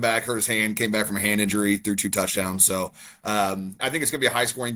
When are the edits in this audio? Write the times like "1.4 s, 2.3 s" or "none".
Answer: 3.8 s